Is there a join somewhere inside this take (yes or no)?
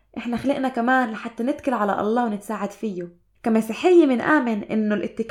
yes